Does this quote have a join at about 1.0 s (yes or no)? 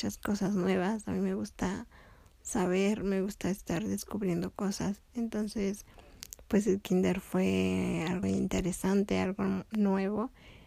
no